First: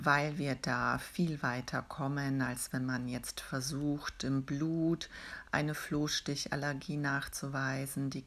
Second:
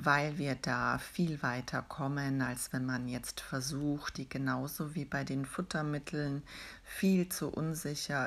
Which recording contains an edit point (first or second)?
second